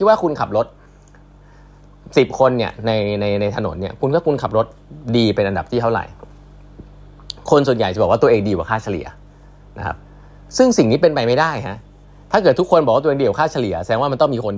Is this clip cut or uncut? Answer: uncut